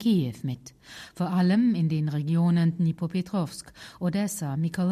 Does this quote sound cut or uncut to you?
uncut